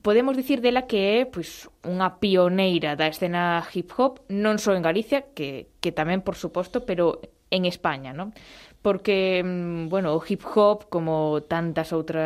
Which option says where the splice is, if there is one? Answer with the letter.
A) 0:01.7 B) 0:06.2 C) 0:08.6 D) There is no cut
D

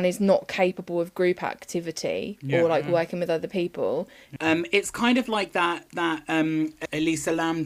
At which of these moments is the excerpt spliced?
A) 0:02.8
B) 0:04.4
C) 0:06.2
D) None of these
B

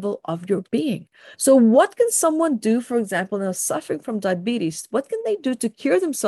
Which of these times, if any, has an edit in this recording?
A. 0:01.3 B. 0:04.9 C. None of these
A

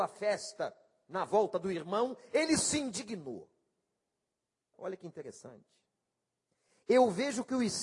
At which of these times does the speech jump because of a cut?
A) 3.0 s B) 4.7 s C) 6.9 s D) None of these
B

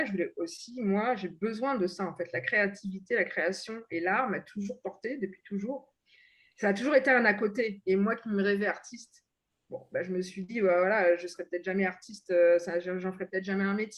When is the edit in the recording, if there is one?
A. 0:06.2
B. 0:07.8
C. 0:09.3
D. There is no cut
D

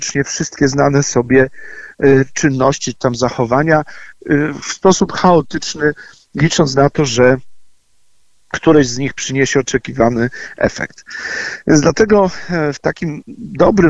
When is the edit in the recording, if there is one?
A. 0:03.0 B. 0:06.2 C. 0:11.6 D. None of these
D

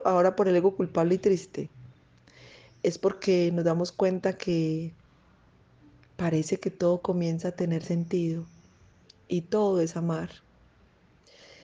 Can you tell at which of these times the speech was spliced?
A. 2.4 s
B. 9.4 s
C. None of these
C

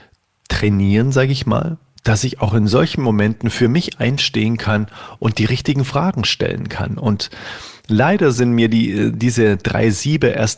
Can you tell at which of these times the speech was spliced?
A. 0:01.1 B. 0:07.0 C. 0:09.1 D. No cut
D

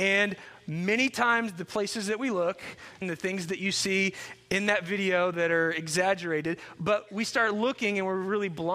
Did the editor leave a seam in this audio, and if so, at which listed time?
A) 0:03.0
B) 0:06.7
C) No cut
A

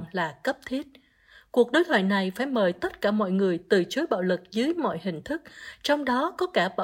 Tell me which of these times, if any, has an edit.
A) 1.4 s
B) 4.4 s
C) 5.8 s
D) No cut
D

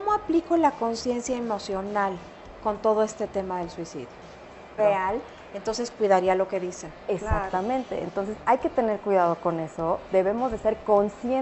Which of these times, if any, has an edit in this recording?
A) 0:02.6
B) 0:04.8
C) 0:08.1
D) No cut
B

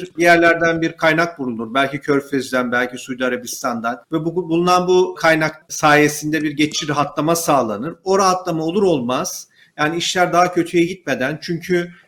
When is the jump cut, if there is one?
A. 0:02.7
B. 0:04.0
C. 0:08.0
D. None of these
B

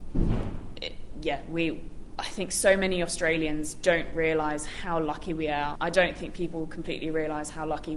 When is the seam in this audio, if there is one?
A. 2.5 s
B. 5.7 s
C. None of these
B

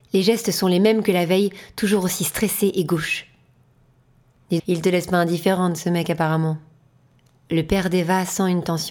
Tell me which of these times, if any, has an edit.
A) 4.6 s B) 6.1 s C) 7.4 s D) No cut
A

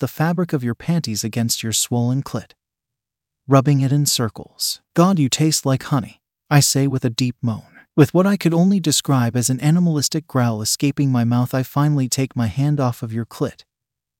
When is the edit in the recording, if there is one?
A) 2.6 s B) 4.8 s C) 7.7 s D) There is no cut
B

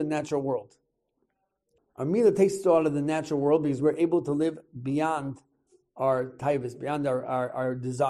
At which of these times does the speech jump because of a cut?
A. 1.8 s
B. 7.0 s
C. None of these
A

